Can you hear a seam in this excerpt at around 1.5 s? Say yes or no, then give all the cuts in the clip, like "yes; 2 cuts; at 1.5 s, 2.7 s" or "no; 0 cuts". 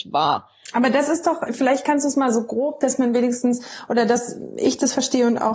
yes; 1 cut; at 1.5 s